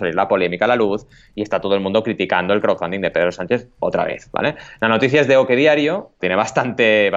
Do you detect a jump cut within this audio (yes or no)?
yes